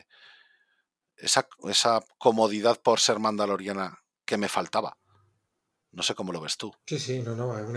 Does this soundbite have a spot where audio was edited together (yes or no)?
yes